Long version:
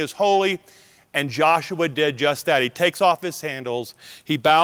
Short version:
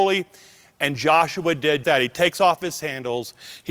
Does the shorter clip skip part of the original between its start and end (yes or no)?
yes